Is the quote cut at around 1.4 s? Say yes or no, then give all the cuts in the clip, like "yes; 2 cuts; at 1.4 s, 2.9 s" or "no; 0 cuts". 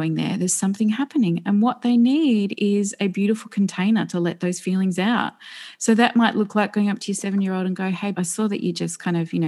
no; 1 cut; at 8.1 s